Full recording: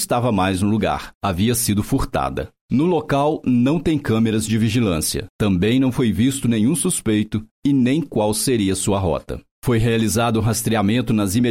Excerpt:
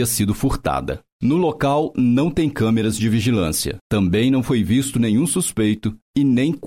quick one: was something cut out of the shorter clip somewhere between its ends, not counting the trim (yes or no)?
no